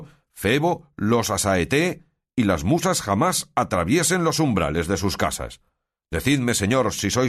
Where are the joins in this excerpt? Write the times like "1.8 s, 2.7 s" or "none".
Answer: none